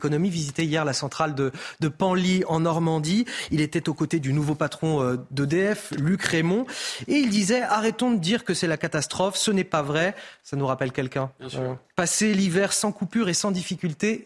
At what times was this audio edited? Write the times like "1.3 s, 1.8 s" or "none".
none